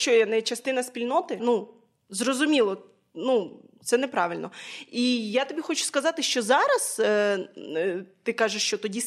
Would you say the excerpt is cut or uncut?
cut